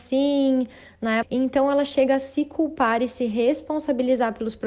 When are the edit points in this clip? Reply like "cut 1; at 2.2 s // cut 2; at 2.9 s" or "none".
cut 1; at 1.2 s